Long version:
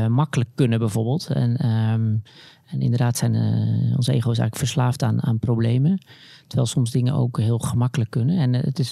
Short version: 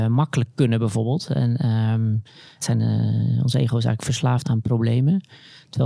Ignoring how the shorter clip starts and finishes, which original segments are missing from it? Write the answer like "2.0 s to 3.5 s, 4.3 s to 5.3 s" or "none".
2.6 s to 3.1 s, 5.0 s to 5.2 s